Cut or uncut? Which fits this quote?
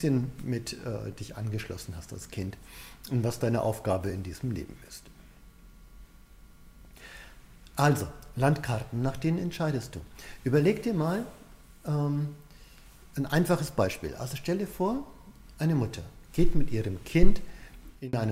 uncut